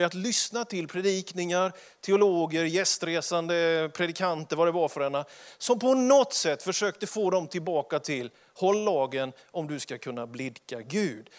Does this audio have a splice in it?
no; 0 cuts

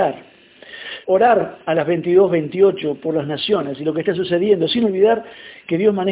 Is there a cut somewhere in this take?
yes; 1 cut; at 1.0 s

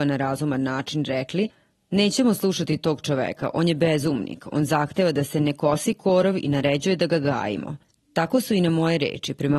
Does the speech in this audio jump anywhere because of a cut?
no; 0 cuts

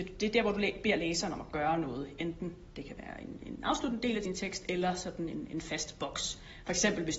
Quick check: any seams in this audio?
no; 0 cuts

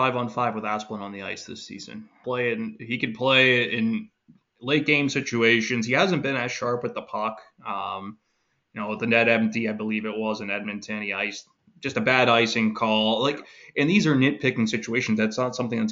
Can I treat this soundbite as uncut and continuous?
no; 1 cut; at 2.2 s

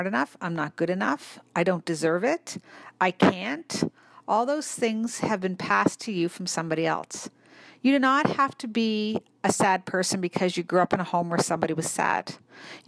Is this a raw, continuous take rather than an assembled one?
yes; 0 cuts

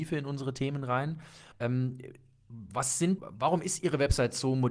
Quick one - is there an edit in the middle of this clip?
yes; 2 cuts; at 1.5 s, 3.2 s

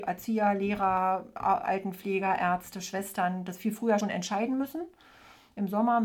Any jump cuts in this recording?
yes; 1 cut; at 4.0 s

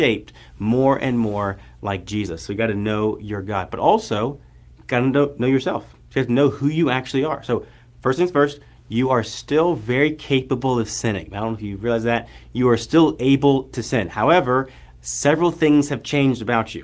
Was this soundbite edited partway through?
no; 0 cuts

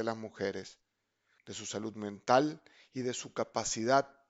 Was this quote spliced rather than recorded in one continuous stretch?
yes; 1 cut; at 1.4 s

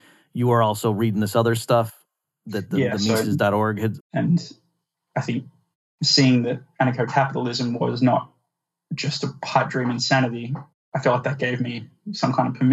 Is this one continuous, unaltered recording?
no; 1 cut; at 4.0 s

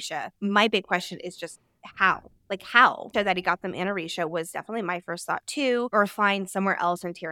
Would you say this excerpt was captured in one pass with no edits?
yes; 0 cuts

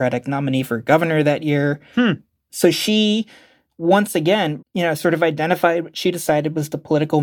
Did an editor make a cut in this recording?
yes; 1 cut; at 4.6 s

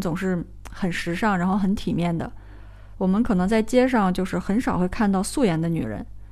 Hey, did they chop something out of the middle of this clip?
no; 0 cuts

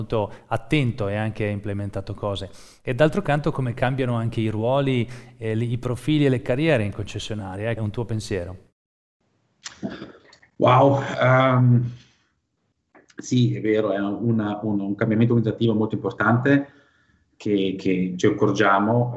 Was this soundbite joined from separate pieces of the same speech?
yes; 1 cut; at 7.8 s

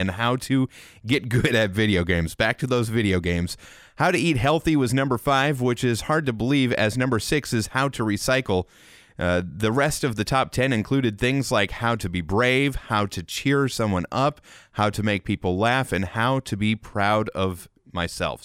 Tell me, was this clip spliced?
no; 0 cuts

